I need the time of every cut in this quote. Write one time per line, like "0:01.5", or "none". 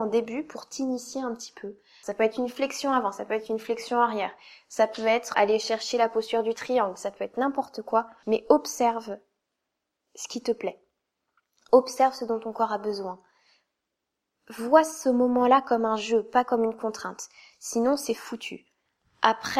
0:02.0
0:05.3